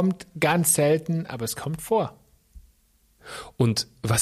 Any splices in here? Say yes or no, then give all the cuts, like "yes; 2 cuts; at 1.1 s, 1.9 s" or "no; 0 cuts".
no; 0 cuts